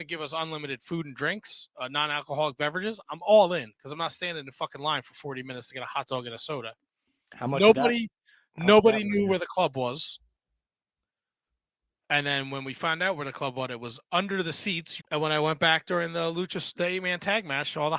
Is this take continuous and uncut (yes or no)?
no